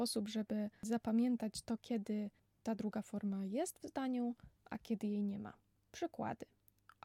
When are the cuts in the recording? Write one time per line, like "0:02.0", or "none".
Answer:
none